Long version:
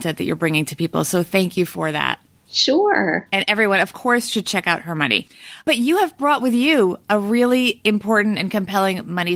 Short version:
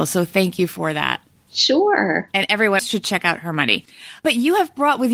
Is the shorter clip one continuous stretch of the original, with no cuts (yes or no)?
no